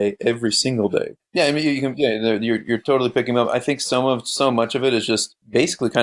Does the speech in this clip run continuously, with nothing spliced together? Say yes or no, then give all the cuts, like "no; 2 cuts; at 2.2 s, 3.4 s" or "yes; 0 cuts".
no; 1 cut; at 1.2 s